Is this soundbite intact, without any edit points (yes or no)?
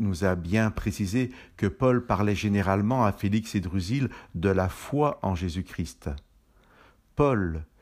yes